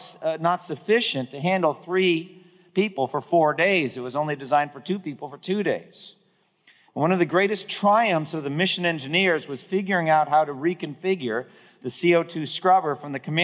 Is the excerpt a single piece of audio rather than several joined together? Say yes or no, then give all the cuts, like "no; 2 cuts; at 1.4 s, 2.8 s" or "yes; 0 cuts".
yes; 0 cuts